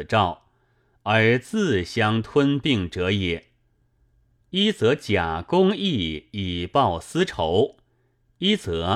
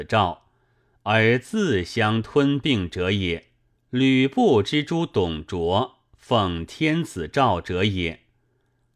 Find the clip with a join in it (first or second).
second